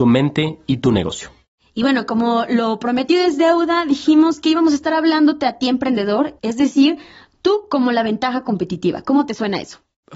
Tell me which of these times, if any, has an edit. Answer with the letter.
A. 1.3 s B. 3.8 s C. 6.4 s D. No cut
C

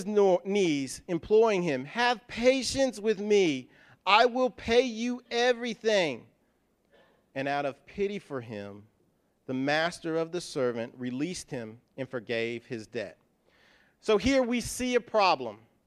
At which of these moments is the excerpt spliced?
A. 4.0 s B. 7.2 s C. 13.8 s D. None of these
D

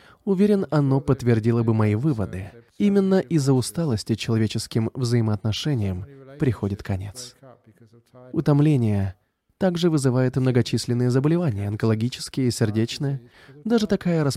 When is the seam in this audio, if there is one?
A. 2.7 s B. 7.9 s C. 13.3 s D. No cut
A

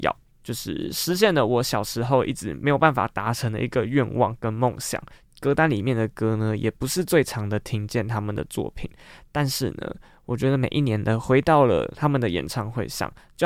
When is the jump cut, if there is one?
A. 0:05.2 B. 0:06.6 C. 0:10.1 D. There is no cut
A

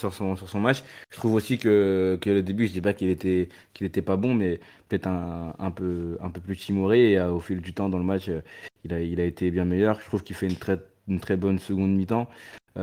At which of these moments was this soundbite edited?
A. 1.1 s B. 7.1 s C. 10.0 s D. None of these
D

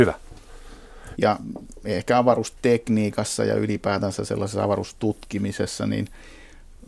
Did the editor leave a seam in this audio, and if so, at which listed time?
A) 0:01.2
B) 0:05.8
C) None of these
A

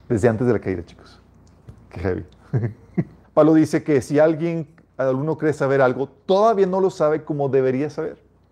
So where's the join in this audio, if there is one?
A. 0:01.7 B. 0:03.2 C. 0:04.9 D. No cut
B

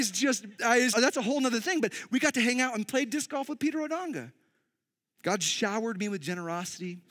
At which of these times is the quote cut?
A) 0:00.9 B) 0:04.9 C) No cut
A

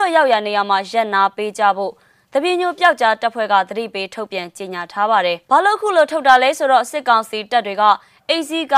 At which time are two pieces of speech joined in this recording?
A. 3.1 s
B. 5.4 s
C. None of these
B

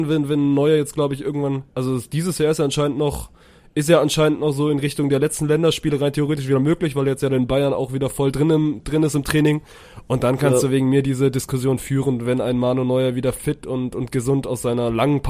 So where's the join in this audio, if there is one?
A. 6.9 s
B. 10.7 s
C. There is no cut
C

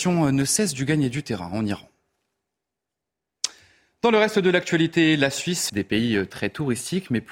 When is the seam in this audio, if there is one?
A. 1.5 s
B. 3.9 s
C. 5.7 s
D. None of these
C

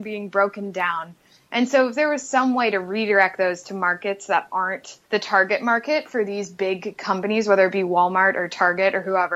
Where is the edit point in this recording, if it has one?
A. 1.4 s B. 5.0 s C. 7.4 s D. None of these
B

